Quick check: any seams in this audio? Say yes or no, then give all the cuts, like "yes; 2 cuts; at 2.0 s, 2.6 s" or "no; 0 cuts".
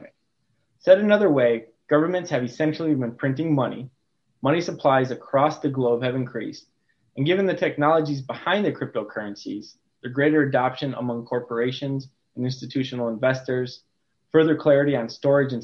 no; 0 cuts